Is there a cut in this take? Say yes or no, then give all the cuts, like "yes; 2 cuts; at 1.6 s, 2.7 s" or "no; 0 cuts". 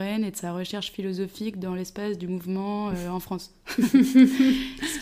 no; 0 cuts